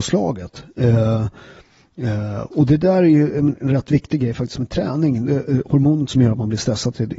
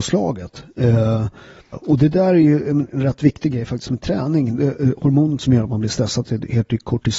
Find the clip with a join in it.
second; 1 cut; at 1.7 s

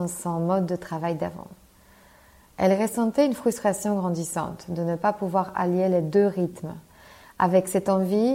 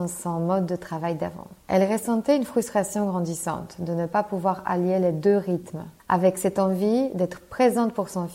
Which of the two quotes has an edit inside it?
second; 2 cuts; at 1.6 s, 6.0 s

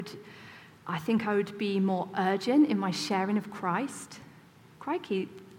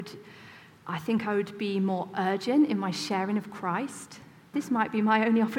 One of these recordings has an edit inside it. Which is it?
second; 1 cut; at 4.5 s

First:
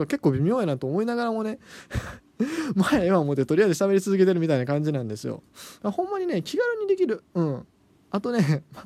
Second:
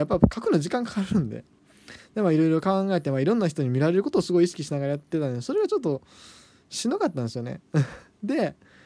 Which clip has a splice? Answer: first; 1 cut; at 5.8 s

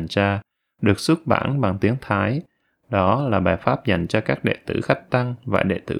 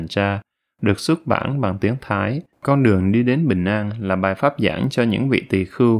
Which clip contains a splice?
second; 1 cut; at 2.5 s

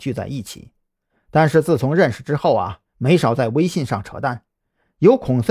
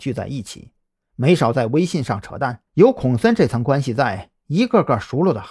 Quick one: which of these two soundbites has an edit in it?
second; 2 cuts; at 1.1 s, 2.7 s

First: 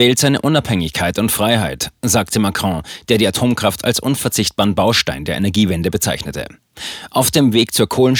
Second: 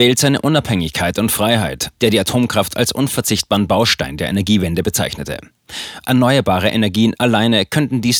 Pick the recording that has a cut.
second; 2 cuts; at 2.0 s, 6.0 s

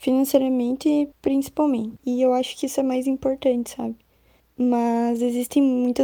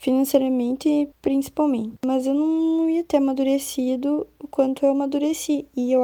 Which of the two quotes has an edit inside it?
first; 2 cuts; at 2.0 s, 4.4 s

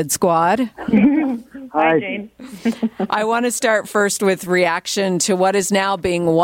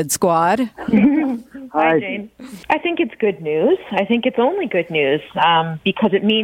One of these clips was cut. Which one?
second; 1 cut; at 2.6 s

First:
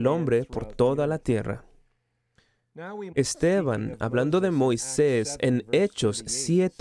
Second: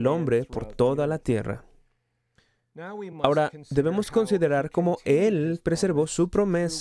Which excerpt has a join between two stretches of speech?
first; 1 cut; at 3.1 s

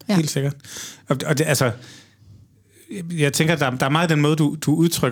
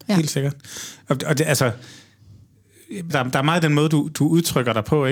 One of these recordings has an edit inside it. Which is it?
second; 1 cut; at 3.1 s

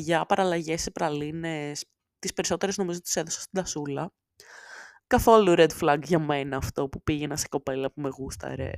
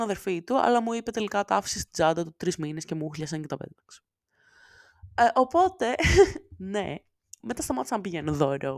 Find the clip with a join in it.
first; 1 cut; at 5.0 s

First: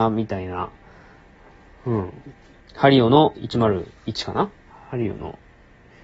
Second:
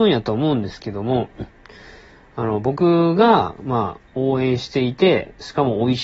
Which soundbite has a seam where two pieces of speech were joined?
first; 1 cut; at 2.6 s

